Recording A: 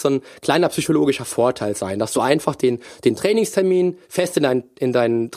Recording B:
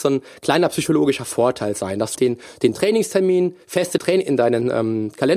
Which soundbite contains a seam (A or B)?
B